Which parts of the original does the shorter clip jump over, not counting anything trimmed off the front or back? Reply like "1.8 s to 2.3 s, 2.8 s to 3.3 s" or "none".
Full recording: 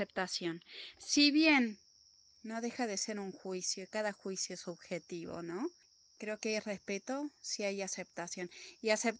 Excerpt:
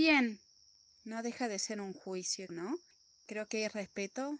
3.9 s to 5.4 s

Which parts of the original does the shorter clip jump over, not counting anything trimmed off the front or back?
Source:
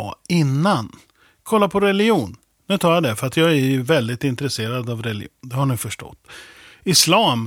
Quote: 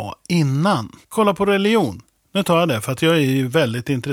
1.0 s to 1.4 s

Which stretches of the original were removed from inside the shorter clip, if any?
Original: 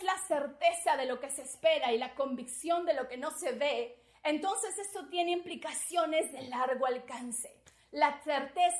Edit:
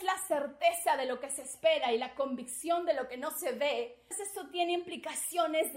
4.1 s to 4.7 s

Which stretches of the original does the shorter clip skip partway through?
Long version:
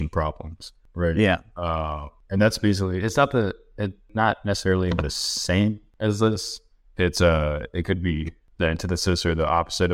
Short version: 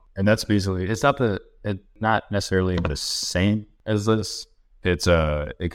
none

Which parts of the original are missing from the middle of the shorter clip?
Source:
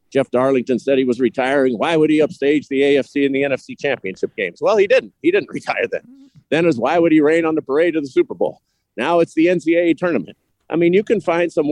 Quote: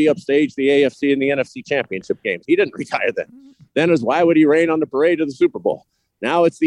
4.5 s to 5.2 s

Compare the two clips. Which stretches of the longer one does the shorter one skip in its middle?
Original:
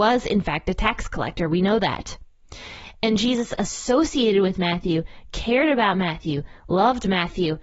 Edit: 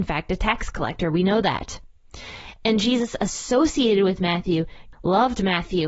5.3 s to 6.6 s

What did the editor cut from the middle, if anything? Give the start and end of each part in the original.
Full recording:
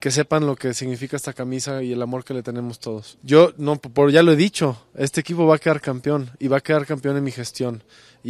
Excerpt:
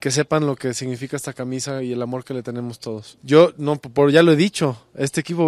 none

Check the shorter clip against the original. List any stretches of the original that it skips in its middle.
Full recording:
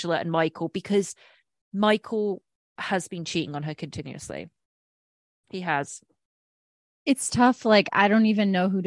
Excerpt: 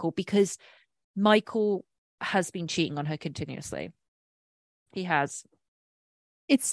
none

